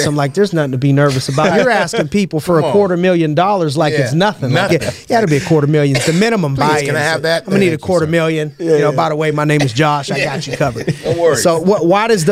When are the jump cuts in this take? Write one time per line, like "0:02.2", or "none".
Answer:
none